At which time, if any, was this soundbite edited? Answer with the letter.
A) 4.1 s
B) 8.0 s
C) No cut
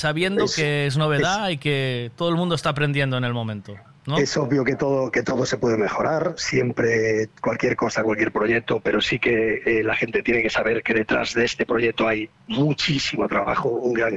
C